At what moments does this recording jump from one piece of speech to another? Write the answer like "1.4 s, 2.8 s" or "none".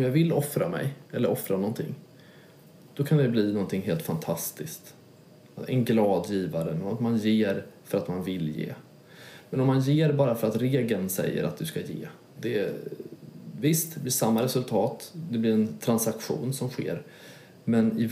12.4 s